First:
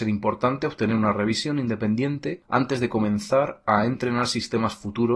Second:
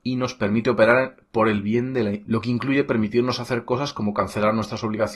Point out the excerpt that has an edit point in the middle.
second; 1 cut; at 2.2 s

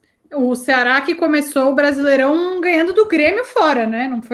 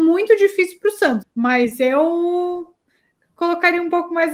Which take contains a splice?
second; 1 cut; at 1.2 s

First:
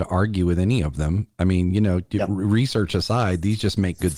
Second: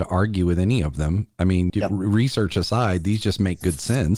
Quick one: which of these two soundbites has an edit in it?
second; 1 cut; at 1.7 s

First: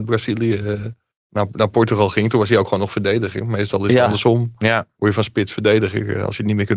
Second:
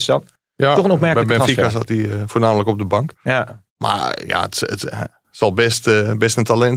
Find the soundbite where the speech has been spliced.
second; 1 cut; at 3.7 s

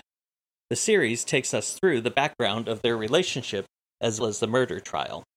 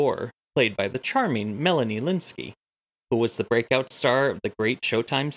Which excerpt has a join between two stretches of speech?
first; 1 cut; at 4.2 s

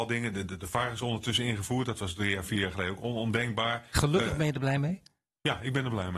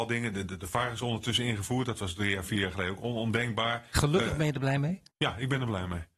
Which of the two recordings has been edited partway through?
second; 1 cut; at 5.1 s

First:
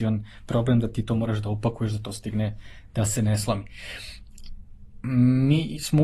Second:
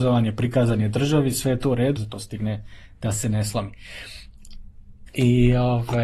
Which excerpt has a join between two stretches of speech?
second; 2 cuts; at 2.0 s, 5.1 s

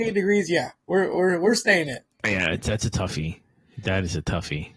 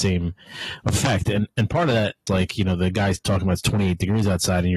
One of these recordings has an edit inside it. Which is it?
second; 1 cut; at 2.3 s

